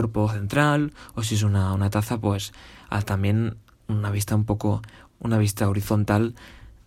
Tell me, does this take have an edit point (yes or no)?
no